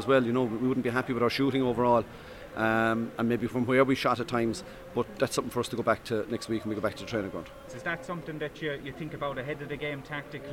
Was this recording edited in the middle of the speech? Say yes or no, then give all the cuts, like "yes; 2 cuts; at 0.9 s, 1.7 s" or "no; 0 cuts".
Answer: yes; 1 cut; at 7.7 s